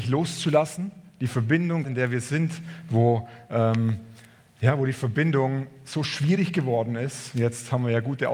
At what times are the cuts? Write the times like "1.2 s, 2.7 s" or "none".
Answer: 1.8 s